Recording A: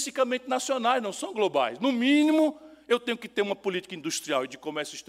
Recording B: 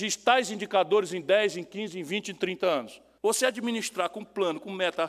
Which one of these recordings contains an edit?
B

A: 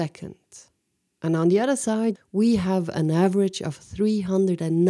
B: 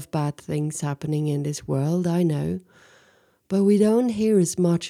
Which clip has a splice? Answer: A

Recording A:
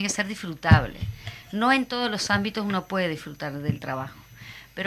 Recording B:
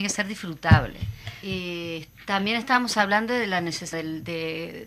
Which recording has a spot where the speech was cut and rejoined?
B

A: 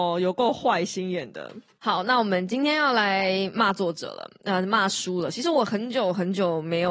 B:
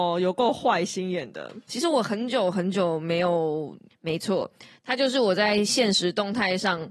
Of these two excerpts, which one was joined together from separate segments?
B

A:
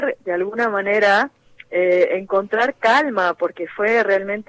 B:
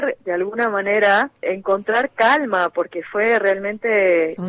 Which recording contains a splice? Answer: B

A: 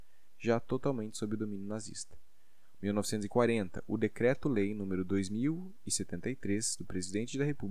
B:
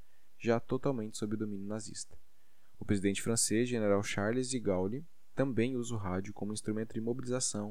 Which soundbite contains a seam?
A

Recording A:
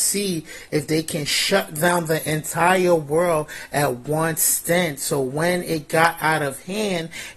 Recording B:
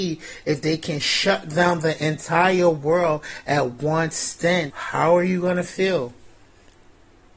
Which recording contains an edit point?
B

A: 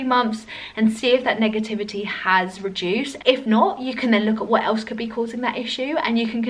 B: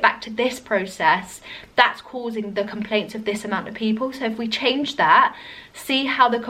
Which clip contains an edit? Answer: A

